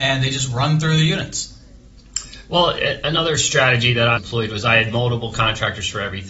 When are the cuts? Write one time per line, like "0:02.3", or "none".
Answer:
0:04.2